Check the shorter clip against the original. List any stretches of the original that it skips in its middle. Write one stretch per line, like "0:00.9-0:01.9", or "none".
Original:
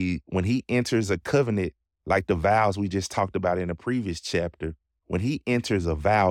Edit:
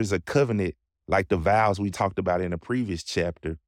0:02.9-0:03.1